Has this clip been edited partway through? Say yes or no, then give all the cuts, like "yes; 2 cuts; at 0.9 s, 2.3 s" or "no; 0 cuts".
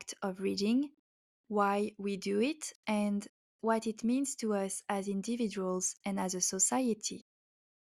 no; 0 cuts